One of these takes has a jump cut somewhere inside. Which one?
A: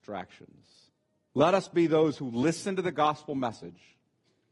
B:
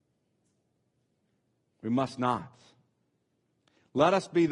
A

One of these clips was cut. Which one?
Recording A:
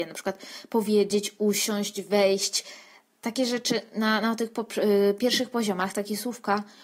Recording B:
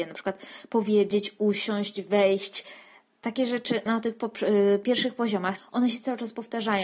B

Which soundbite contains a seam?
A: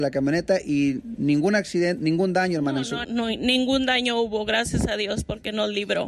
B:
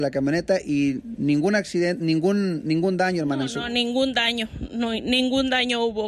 A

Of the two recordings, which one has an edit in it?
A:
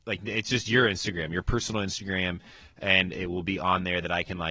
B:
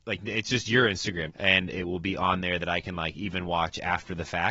B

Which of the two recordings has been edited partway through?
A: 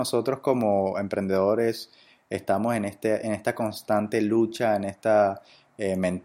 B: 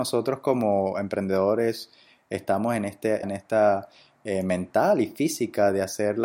B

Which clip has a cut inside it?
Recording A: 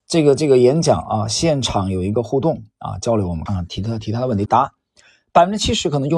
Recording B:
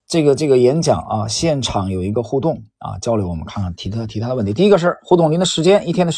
A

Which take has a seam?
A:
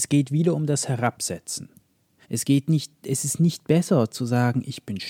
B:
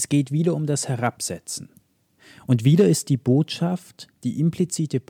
A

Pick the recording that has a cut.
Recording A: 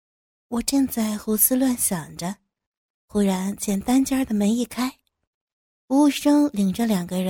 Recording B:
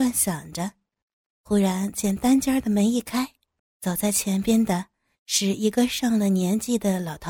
B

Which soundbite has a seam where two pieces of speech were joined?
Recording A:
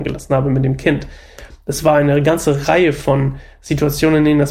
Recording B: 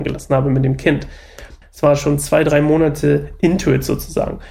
B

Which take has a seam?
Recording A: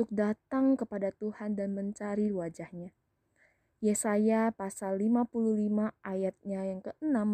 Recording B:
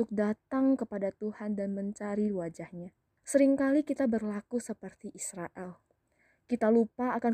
B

